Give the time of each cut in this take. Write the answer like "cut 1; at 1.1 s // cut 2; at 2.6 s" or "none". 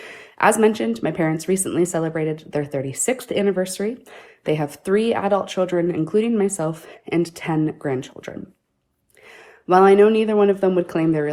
none

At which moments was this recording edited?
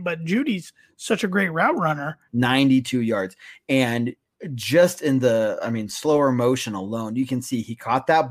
cut 1; at 2.3 s

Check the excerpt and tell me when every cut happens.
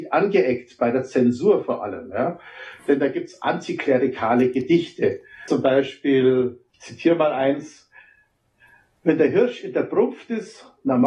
cut 1; at 6.7 s

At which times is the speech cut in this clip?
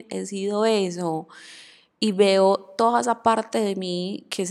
none

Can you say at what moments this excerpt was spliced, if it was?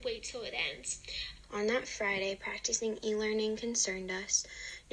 cut 1; at 1.4 s

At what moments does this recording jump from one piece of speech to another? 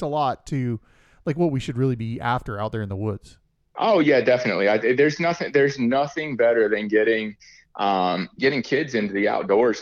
cut 1; at 8.4 s

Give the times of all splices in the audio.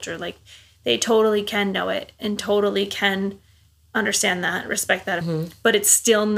cut 1; at 5.2 s

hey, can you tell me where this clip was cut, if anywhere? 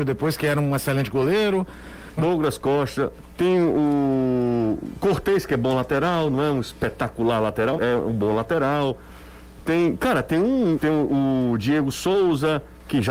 cut 1; at 2.2 s // cut 2; at 7.8 s // cut 3; at 10.8 s

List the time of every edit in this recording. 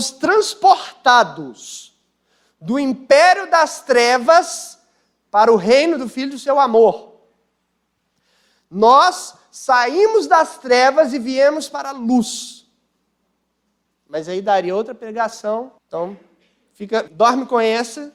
cut 1; at 13.9 s // cut 2; at 15.8 s // cut 3; at 17.1 s

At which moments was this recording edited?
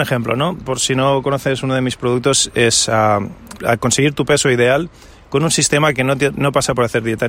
cut 1; at 3.6 s

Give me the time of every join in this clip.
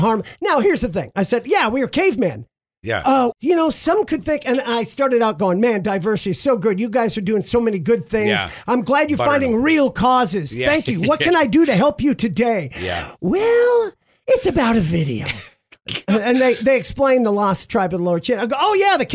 cut 1; at 3.3 s

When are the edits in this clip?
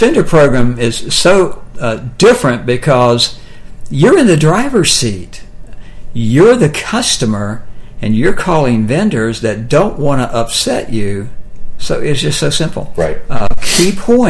cut 1; at 11.8 s

